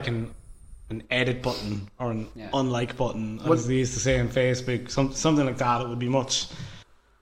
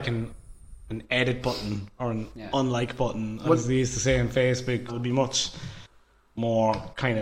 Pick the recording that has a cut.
second; 1 cut; at 4.9 s

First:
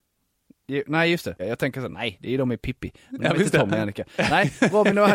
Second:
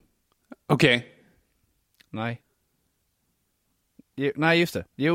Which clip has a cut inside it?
first; 1 cut; at 1.4 s

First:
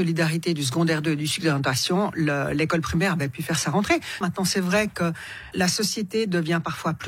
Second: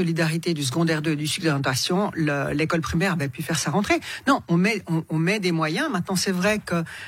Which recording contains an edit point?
first; 2 cuts; at 4.2 s, 5.5 s

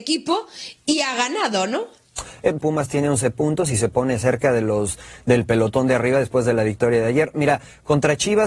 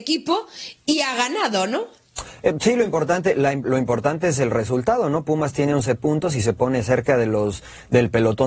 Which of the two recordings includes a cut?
first; 1 cut; at 2.6 s

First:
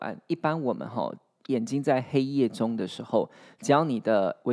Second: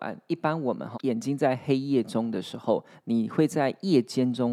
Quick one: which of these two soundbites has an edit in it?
second; 2 cuts; at 0.9 s, 2.9 s

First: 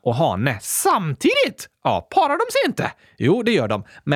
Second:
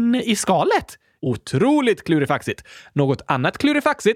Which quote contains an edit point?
second; 1 cut; at 1.2 s

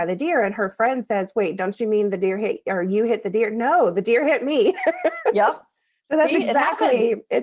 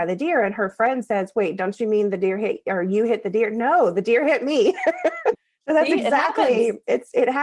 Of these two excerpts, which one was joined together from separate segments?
second; 1 cut; at 5.3 s

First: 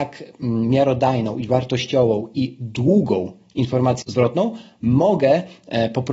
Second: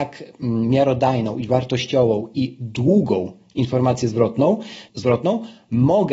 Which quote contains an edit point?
first; 1 cut; at 4.0 s

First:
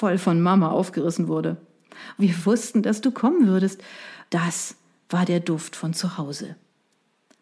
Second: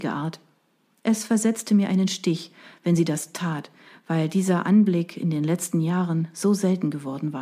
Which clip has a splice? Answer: first; 2 cuts; at 2.2 s, 4.3 s

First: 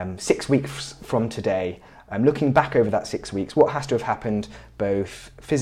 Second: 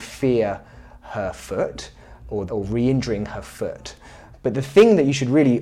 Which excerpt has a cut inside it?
second; 2 cuts; at 2.5 s, 4.3 s

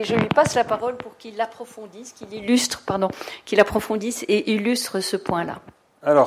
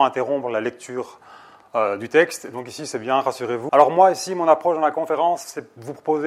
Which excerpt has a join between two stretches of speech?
second; 1 cut; at 3.7 s

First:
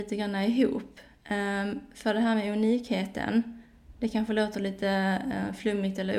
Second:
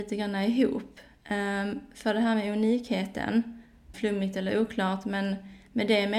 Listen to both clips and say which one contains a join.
second; 1 cut; at 3.9 s

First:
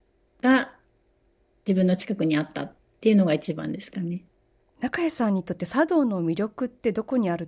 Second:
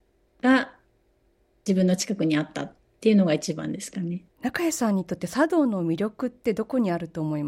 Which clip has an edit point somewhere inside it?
second; 1 cut; at 4.3 s

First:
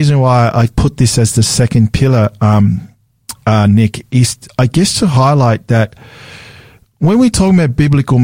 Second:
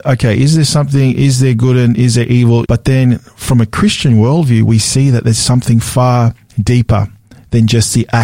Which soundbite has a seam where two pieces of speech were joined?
second; 1 cut; at 2.6 s

